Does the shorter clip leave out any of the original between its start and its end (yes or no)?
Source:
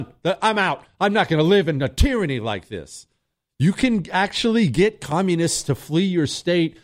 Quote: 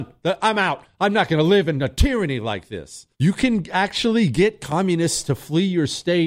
yes